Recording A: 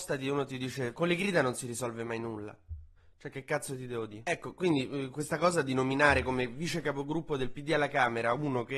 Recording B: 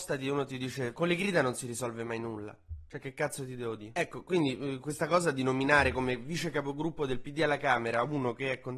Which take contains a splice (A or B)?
B